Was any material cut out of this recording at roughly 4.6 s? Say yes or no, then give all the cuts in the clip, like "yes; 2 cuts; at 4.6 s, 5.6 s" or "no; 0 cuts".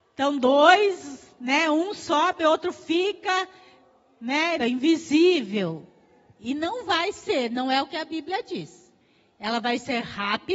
yes; 1 cut; at 4.6 s